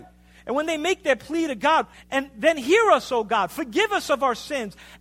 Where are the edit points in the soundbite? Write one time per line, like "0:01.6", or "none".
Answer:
0:01.9